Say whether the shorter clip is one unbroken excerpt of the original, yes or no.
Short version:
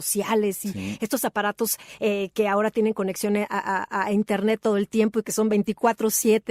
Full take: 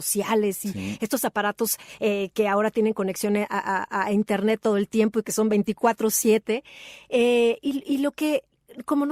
yes